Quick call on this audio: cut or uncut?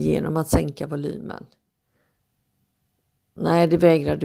uncut